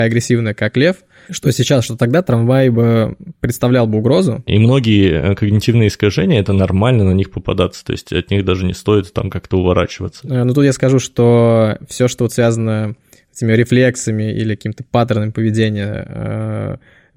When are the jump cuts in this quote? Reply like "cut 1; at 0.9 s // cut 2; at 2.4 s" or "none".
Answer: cut 1; at 4.5 s